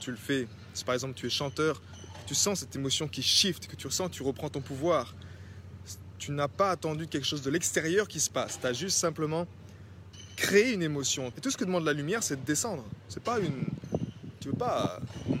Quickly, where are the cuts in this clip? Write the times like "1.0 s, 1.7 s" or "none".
11.3 s